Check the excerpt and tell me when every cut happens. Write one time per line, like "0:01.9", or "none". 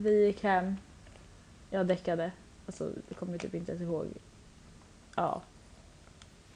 0:01.6